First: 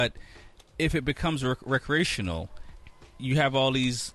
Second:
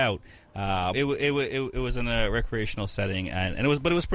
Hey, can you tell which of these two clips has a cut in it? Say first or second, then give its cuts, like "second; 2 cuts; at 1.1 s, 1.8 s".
second; 1 cut; at 0.9 s